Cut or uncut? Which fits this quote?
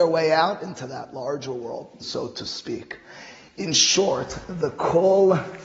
cut